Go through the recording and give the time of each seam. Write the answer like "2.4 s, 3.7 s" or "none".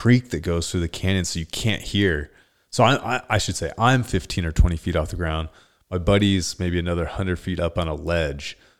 none